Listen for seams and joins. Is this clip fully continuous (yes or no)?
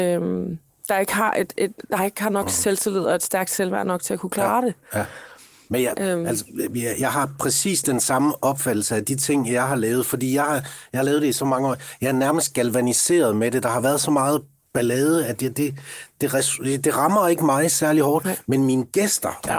yes